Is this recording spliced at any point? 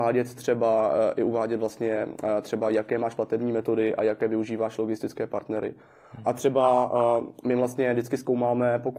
no; 0 cuts

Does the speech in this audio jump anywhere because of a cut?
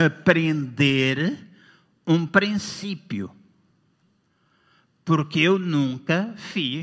no; 0 cuts

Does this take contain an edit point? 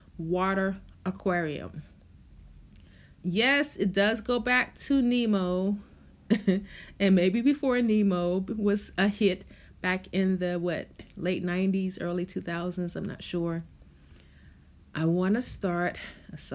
no; 0 cuts

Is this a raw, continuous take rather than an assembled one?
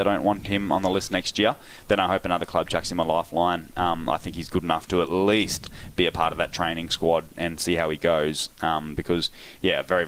yes; 0 cuts

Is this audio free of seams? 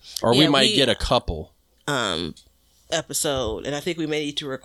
no; 1 cut; at 1.8 s

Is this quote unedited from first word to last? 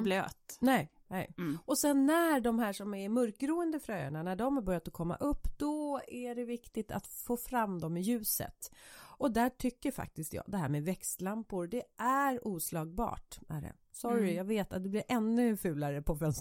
no; 1 cut; at 13.8 s

